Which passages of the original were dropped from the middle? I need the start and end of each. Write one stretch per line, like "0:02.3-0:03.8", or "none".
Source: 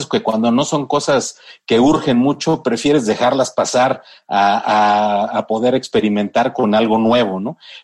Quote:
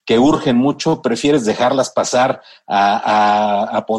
none